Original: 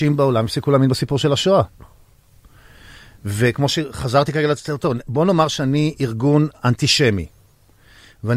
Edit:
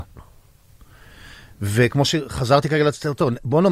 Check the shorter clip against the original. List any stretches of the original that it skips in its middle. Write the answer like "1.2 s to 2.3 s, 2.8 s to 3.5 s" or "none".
none